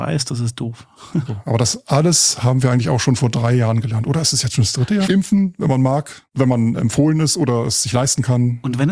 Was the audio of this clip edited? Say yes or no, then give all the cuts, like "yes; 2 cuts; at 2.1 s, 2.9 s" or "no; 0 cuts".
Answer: yes; 2 cuts; at 1.3 s, 5.1 s